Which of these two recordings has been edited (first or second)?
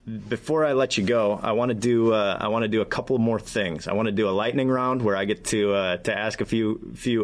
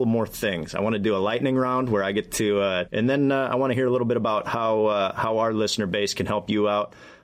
second